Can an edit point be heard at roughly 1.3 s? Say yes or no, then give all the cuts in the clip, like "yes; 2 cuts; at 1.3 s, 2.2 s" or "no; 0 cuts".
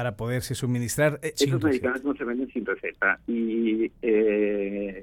yes; 1 cut; at 1.3 s